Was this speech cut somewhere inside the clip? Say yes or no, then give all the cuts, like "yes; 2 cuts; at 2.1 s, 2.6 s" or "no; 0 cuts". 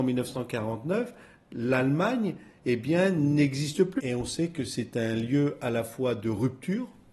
yes; 1 cut; at 4.0 s